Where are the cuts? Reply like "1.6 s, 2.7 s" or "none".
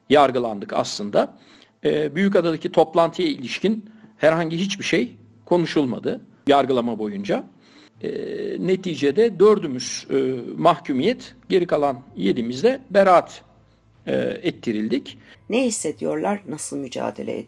15.3 s